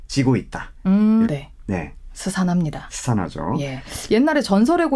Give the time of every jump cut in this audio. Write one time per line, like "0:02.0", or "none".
0:01.2